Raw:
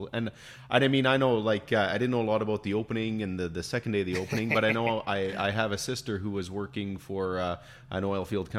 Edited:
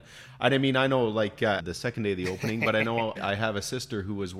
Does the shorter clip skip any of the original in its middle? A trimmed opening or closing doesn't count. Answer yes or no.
yes